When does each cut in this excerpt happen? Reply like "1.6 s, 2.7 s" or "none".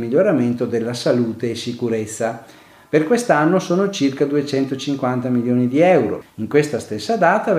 6.2 s